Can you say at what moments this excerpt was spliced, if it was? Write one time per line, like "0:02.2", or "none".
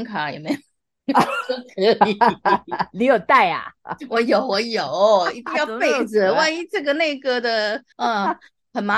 0:07.9